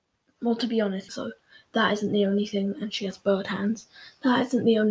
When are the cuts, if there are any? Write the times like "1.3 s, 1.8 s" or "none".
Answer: 1.1 s